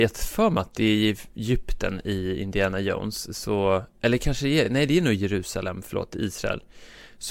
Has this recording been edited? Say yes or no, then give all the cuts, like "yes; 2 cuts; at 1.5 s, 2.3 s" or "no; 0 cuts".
no; 0 cuts